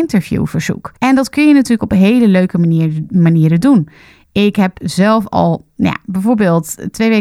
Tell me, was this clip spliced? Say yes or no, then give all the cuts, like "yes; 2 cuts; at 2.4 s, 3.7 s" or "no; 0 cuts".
yes; 1 cut; at 1.0 s